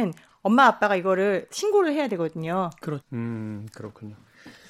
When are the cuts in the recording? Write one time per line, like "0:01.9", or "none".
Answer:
0:03.0